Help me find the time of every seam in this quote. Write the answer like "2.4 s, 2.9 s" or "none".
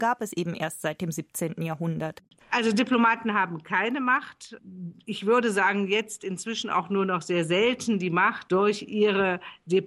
none